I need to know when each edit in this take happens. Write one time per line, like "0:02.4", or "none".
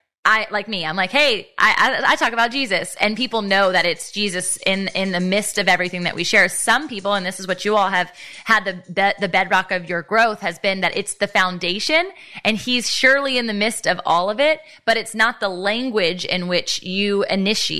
none

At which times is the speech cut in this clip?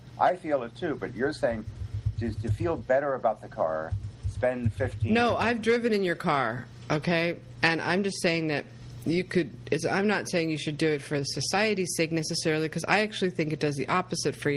0:07.6

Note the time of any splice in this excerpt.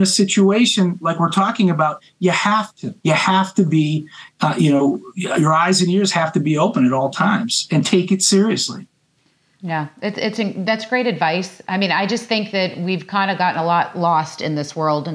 0:03.0

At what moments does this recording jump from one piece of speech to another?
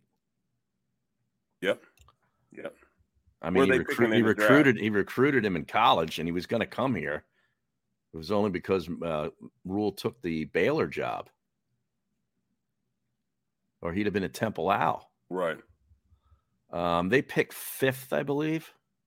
none

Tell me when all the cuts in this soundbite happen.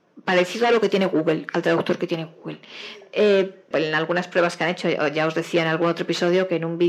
0:03.7

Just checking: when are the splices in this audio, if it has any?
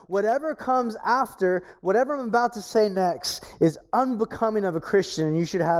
none

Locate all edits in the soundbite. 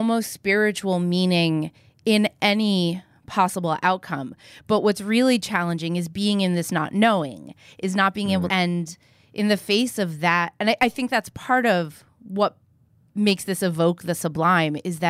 0:08.5

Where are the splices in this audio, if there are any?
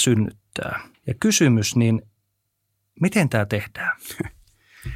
0:00.9

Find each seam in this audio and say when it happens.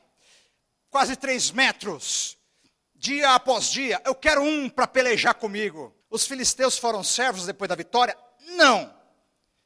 0:06.0

